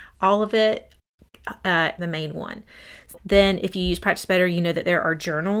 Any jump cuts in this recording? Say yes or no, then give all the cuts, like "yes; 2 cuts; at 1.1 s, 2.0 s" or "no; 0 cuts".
yes; 2 cuts; at 2.0 s, 3.2 s